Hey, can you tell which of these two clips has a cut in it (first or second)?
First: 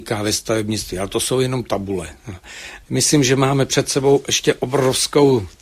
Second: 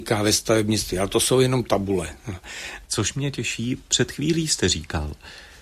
second